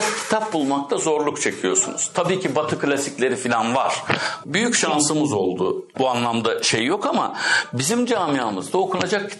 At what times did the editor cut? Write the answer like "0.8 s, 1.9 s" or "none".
4.4 s, 5.9 s